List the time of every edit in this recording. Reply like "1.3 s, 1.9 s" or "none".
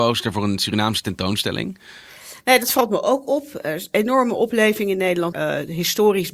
5.3 s